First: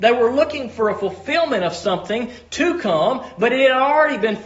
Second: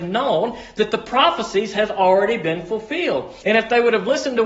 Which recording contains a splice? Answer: second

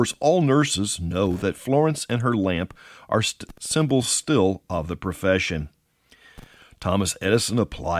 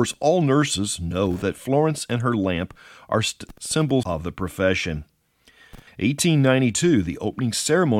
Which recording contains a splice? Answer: second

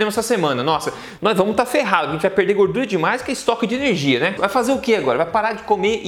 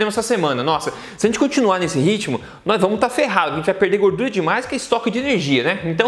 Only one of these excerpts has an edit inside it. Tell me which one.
first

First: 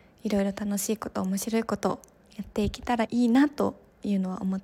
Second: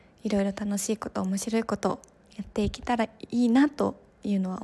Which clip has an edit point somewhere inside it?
first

